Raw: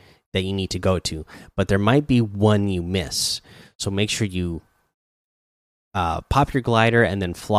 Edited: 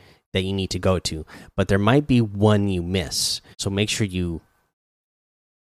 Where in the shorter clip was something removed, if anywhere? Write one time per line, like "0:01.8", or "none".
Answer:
0:03.5